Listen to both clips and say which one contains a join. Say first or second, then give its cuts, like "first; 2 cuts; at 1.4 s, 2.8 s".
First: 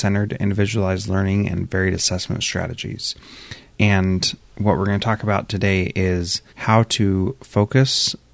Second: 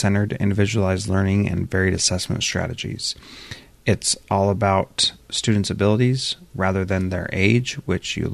first; 2 cuts; at 3.7 s, 6.5 s